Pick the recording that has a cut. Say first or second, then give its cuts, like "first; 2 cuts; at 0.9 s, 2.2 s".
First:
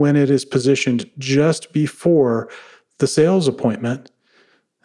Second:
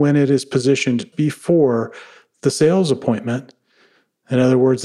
second; 1 cut; at 1.1 s